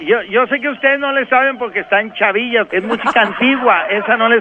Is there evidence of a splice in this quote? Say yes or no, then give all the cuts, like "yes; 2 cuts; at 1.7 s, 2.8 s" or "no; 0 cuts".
yes; 1 cut; at 2.7 s